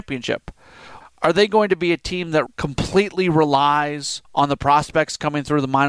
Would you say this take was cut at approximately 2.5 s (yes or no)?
yes